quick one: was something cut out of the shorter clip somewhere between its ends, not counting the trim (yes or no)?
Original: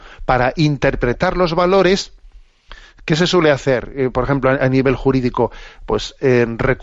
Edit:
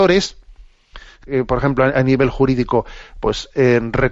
yes